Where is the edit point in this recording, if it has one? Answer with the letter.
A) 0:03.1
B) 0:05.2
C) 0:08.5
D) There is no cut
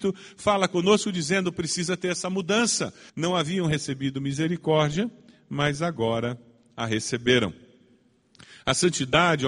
A